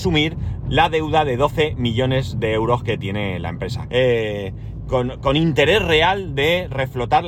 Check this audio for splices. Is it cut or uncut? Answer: cut